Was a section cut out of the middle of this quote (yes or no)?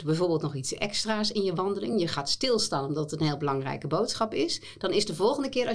no